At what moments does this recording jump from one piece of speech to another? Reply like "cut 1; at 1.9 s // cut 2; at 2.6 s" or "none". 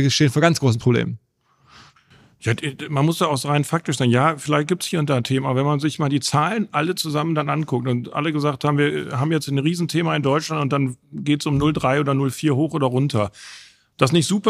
none